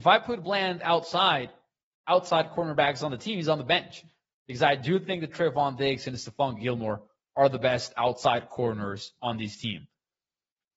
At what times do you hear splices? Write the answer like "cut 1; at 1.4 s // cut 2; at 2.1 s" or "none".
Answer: cut 1; at 2.0 s